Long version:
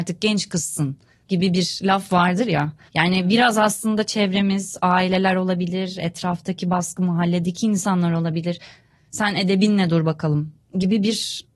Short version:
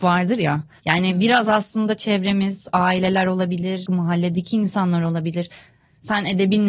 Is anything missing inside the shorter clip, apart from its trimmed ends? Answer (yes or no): yes